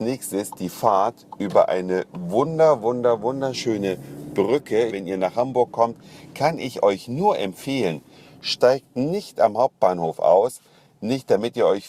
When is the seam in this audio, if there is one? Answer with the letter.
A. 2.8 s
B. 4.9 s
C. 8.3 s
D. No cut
B